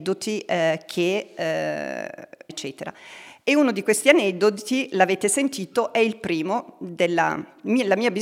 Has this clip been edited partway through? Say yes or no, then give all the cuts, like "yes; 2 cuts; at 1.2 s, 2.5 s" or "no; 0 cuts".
yes; 1 cut; at 2.5 s